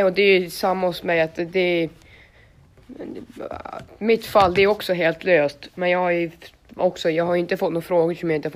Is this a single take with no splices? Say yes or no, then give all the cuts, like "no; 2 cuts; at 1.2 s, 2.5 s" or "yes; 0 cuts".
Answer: yes; 0 cuts